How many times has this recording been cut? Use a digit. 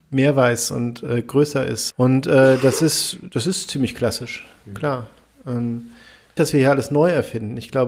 2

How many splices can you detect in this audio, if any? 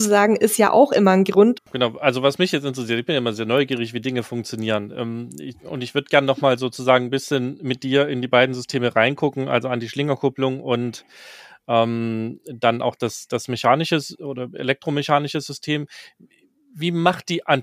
1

